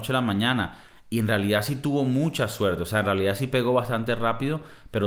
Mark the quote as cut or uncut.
uncut